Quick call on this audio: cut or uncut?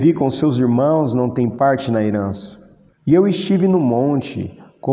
cut